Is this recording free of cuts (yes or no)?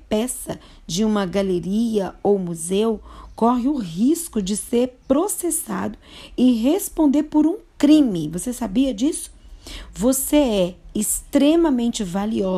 yes